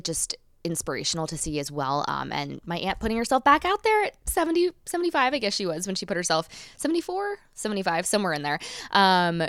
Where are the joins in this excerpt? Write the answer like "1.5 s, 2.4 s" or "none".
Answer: none